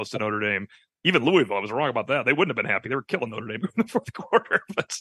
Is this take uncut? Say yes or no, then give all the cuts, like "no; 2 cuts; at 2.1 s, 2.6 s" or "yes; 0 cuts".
yes; 0 cuts